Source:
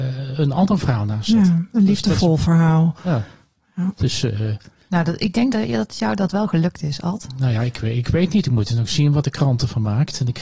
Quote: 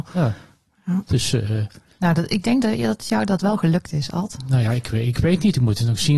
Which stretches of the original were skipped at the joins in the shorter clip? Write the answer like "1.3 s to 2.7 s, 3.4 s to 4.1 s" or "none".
none